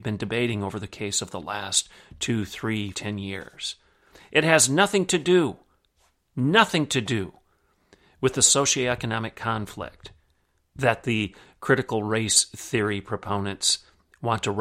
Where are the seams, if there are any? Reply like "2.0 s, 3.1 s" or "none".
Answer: 2.9 s